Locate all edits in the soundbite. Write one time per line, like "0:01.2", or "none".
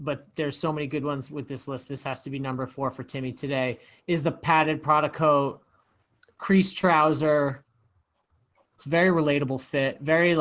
0:08.8

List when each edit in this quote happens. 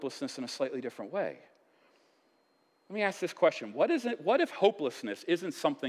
none

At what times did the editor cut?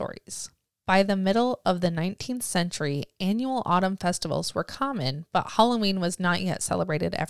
none

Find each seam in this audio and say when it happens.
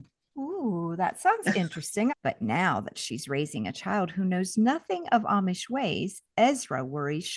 0:02.1

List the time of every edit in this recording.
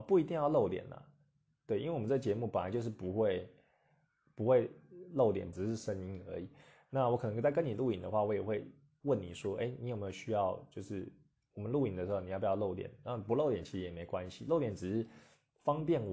0:05.5

